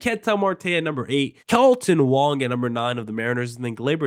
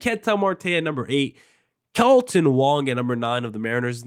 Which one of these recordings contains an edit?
first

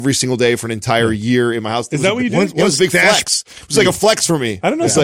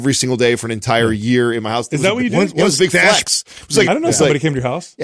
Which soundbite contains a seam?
second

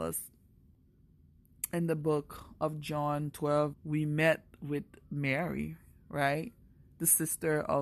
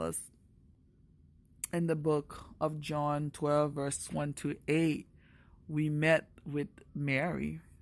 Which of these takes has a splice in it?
first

